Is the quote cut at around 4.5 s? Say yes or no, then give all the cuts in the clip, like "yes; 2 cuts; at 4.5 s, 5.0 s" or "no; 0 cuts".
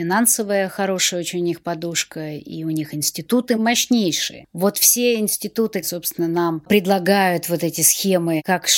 no; 1 cut; at 5.8 s